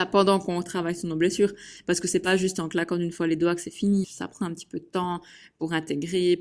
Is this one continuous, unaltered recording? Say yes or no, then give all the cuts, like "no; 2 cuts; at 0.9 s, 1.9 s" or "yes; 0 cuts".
no; 1 cut; at 4.0 s